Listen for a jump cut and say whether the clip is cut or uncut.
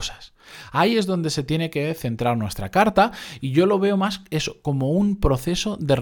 uncut